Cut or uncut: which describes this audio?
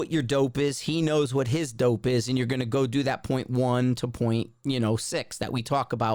uncut